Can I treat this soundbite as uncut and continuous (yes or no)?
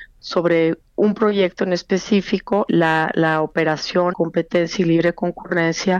no